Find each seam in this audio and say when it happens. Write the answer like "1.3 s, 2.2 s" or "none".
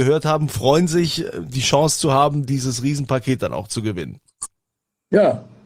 none